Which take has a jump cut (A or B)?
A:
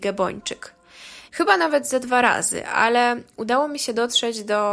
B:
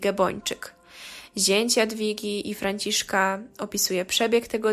A